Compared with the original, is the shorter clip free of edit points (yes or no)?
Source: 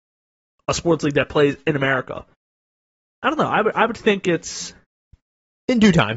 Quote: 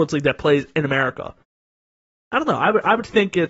yes